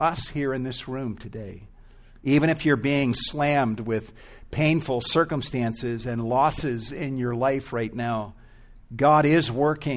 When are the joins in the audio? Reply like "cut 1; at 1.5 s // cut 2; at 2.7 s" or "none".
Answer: cut 1; at 2.2 s // cut 2; at 8.8 s